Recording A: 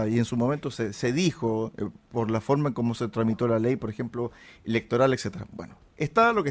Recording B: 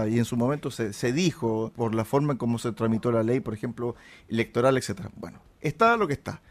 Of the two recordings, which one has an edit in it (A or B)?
B